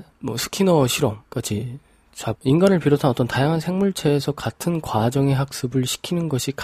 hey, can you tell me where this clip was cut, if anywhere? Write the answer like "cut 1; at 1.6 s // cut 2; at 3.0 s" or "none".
cut 1; at 2.3 s